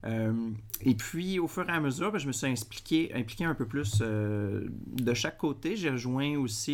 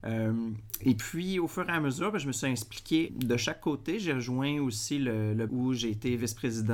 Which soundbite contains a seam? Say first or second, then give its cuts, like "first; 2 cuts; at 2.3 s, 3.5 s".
second; 2 cuts; at 3.1 s, 5.5 s